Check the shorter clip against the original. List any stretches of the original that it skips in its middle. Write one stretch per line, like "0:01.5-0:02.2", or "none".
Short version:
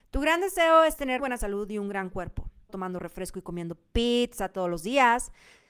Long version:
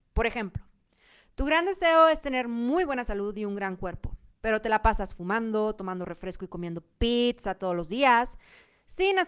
0:02.4-0:02.9
0:04.4-0:05.7